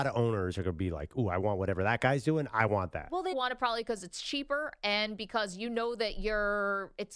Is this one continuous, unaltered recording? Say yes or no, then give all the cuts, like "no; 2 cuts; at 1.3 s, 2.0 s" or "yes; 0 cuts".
no; 1 cut; at 3.3 s